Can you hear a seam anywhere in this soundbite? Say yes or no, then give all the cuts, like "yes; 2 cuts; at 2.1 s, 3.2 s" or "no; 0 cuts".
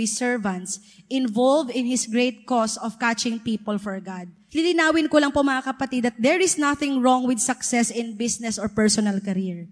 yes; 1 cut; at 4.5 s